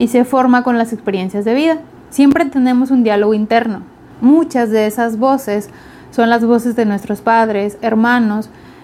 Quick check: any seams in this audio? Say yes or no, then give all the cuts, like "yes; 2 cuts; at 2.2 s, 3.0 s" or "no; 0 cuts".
yes; 3 cuts; at 2.0 s, 4.1 s, 7.8 s